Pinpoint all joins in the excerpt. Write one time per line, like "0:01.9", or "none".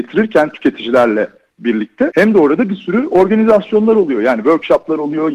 none